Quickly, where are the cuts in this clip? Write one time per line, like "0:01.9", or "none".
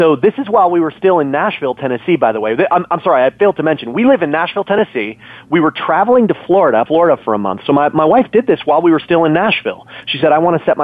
0:06.9